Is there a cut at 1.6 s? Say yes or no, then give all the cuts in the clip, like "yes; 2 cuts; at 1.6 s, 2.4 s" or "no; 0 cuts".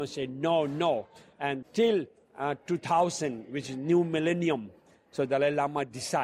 yes; 1 cut; at 1.6 s